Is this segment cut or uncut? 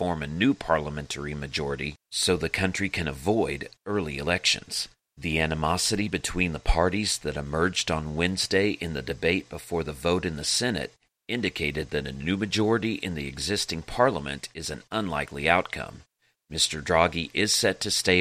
uncut